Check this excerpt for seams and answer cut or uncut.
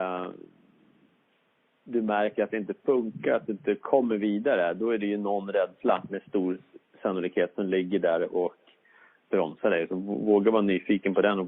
uncut